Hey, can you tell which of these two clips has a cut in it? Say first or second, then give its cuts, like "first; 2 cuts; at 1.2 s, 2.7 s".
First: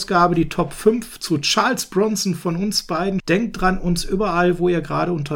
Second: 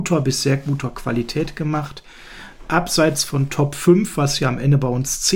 first; 1 cut; at 3.2 s